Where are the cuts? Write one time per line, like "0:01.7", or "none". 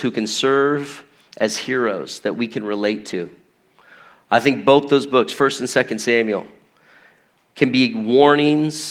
none